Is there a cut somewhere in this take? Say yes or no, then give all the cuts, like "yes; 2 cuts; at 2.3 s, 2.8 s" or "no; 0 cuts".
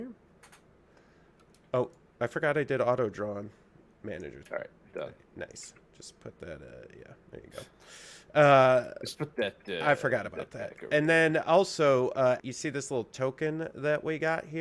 yes; 3 cuts; at 4.4 s, 9.1 s, 12.4 s